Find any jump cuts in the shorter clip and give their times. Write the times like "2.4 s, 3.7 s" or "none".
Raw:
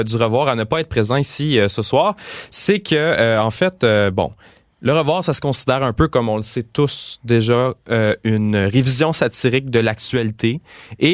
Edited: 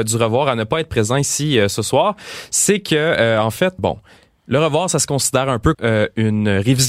3.8 s, 5.7 s